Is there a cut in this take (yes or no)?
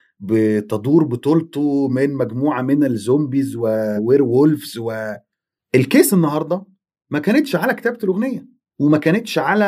yes